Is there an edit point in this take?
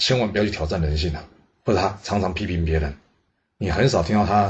yes; 1 cut; at 1.5 s

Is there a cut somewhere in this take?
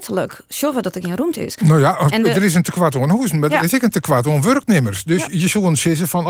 no; 0 cuts

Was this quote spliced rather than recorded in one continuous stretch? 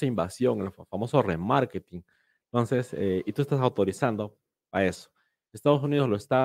no; 0 cuts

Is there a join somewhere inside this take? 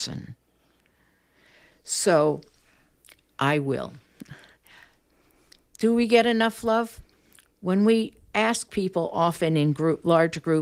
no; 0 cuts

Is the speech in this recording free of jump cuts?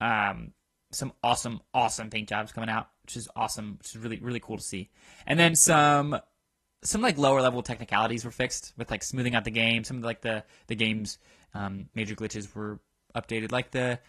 yes; 0 cuts

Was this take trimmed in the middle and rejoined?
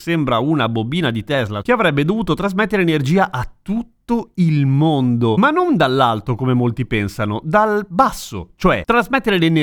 yes; 1 cut; at 1.6 s

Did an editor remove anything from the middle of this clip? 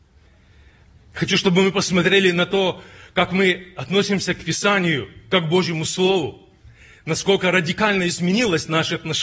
no; 0 cuts

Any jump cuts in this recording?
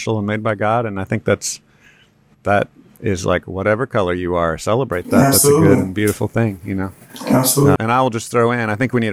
yes; 1 cut; at 7.8 s

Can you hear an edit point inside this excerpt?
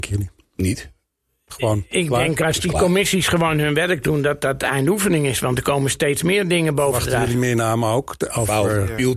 no; 0 cuts

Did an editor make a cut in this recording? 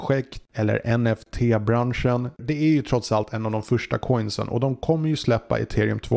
yes; 1 cut; at 2.4 s

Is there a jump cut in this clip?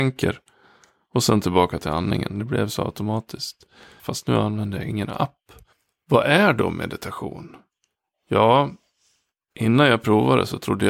yes; 1 cut; at 4.0 s

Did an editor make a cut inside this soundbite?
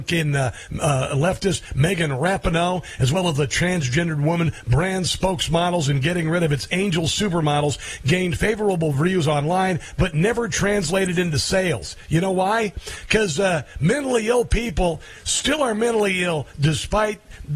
no; 0 cuts

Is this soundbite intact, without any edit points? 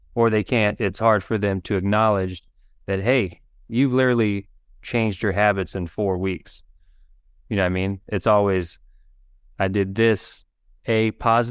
yes; 0 cuts

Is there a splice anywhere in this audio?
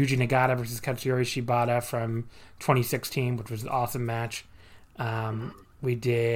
no; 0 cuts

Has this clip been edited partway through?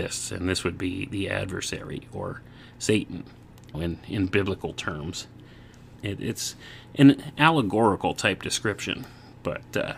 yes; 2 cuts; at 3.7 s, 6.0 s

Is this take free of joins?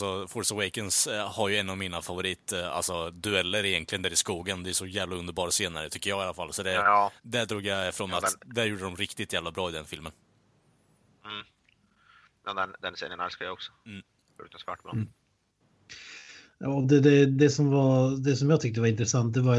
yes; 0 cuts

